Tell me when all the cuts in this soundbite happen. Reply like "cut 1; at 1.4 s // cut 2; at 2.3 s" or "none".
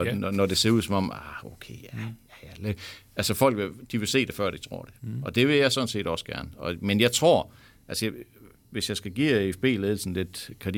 none

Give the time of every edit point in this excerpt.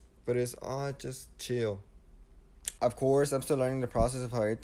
cut 1; at 2.8 s

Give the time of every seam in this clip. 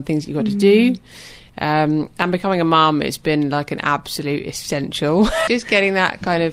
cut 1; at 5.5 s

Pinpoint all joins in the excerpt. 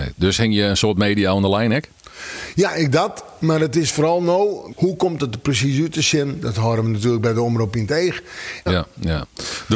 cut 1; at 4.7 s // cut 2; at 8.7 s

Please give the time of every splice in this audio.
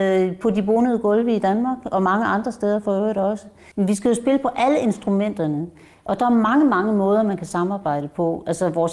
cut 1; at 3.7 s

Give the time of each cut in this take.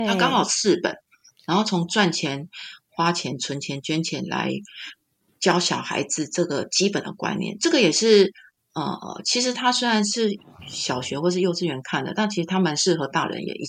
none

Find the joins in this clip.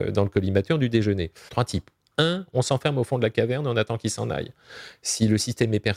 cut 1; at 1.5 s

